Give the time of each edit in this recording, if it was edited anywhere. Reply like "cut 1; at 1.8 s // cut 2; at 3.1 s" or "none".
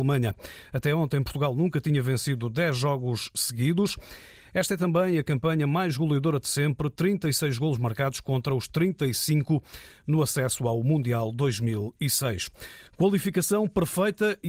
cut 1; at 12.9 s